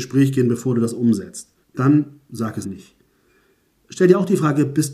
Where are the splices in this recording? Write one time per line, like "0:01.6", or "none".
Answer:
0:01.6
0:02.6